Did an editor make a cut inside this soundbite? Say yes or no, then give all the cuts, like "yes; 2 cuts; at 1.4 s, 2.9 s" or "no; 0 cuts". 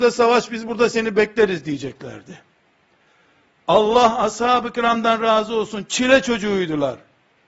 no; 0 cuts